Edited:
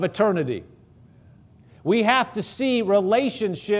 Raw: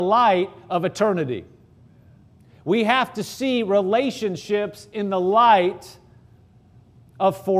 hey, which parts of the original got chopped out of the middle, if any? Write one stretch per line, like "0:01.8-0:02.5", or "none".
none